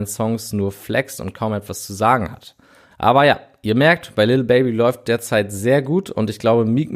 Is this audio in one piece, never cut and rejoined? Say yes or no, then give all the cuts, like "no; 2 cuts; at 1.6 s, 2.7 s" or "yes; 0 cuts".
yes; 0 cuts